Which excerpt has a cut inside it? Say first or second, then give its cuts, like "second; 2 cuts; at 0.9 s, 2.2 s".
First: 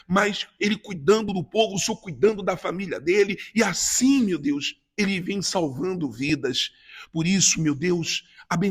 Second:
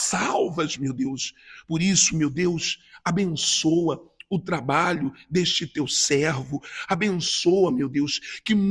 second; 1 cut; at 1.6 s